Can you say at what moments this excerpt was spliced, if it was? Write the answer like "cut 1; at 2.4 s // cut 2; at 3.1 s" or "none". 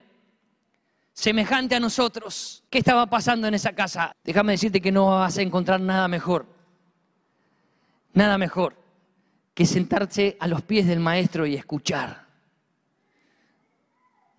cut 1; at 2.7 s // cut 2; at 4.1 s